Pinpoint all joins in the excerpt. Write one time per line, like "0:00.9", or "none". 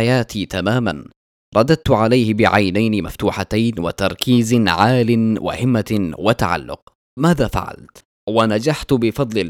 0:08.1